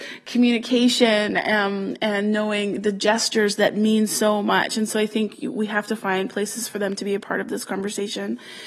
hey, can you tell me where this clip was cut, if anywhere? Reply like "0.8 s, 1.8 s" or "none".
none